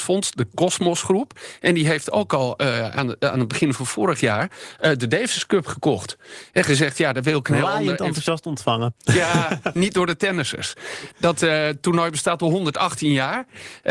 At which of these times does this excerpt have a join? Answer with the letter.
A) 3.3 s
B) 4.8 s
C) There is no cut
C